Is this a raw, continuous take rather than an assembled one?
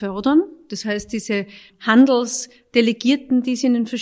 no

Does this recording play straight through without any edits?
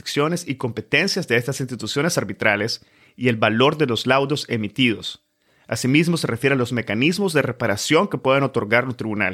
yes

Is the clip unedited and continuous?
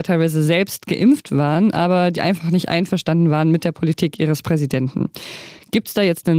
yes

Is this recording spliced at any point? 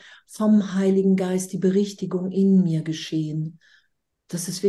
no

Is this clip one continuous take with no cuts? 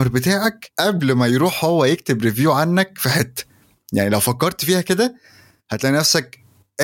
yes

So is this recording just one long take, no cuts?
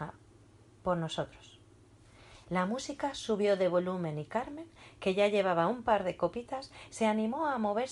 no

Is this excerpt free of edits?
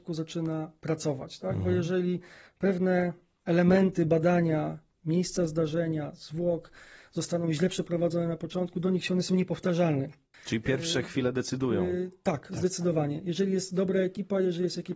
no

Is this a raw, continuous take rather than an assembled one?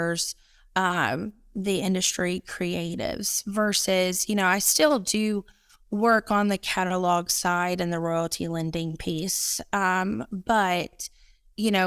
yes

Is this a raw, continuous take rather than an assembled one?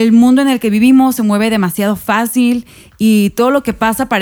yes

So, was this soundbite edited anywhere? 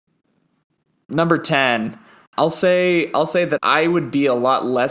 yes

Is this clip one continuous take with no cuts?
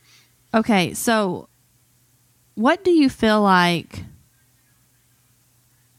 yes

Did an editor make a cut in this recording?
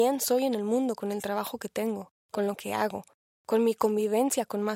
no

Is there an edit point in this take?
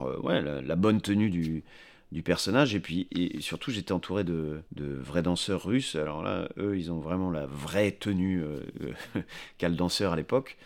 yes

